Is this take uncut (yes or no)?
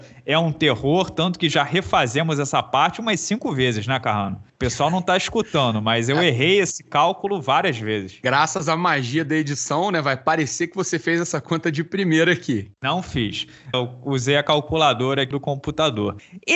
no